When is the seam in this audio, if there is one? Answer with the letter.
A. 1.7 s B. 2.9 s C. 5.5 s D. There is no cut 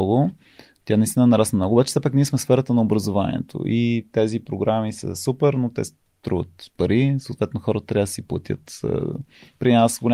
D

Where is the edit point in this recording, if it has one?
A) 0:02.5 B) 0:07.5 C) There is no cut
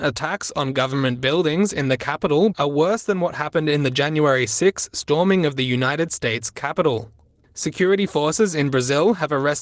A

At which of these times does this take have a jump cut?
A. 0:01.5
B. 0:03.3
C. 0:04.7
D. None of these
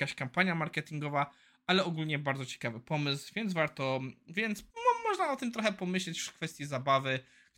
C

